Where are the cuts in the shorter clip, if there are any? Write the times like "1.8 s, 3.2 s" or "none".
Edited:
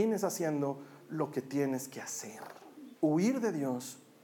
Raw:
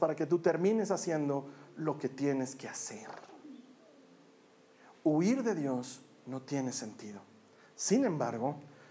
3.0 s

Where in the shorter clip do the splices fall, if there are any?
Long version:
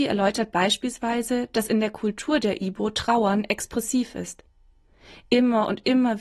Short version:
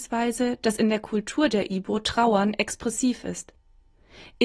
none

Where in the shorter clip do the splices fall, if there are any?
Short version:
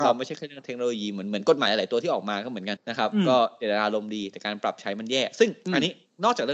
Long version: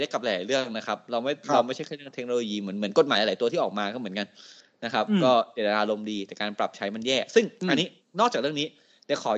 2.8 s

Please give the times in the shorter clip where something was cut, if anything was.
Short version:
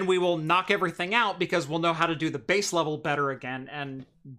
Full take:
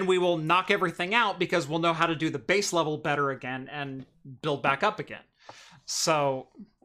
none

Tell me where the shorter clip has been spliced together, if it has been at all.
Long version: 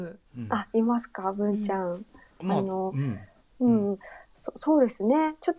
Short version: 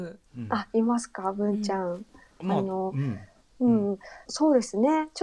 4.3 s

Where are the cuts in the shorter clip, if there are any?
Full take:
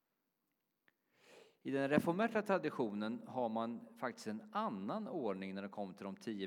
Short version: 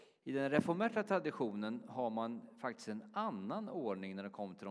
none

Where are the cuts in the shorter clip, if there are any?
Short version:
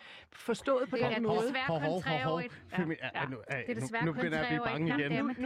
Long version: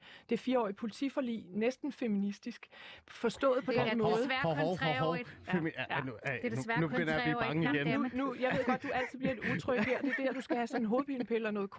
none

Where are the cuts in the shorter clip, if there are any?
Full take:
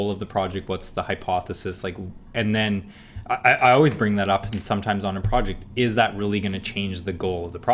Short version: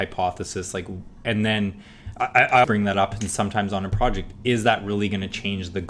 2.6 s

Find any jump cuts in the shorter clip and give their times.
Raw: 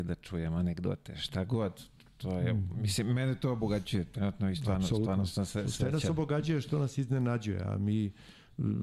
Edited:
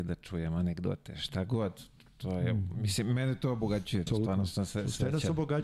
4.1 s

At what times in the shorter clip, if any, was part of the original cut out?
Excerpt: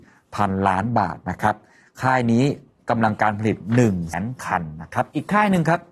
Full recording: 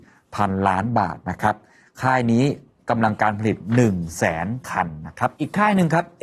4.1 s

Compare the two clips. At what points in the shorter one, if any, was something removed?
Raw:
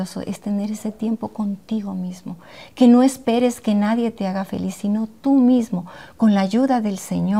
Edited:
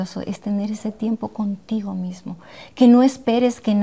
none

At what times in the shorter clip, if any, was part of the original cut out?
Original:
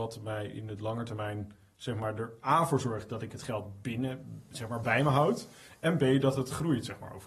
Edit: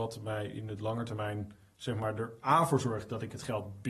none

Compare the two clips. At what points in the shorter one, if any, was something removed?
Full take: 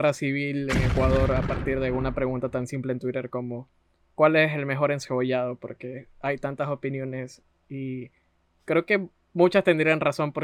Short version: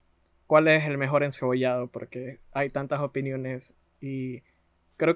none

